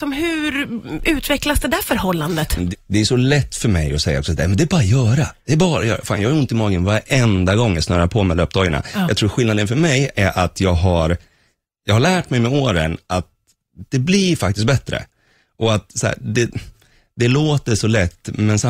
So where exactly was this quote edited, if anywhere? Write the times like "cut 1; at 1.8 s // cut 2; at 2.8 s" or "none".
cut 1; at 2.7 s